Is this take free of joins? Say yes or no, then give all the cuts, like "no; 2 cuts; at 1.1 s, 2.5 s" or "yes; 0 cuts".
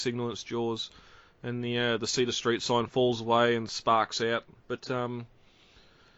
no; 1 cut; at 4.6 s